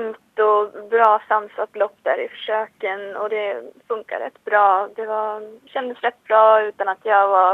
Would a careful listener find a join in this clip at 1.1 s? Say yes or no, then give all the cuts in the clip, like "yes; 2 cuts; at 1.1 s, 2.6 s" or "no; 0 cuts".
no; 1 cut; at 5.7 s